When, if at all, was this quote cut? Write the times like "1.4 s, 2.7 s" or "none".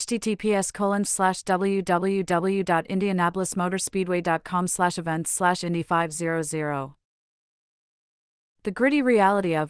1.0 s